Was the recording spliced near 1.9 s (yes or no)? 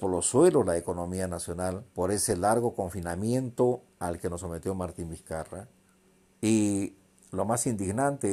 yes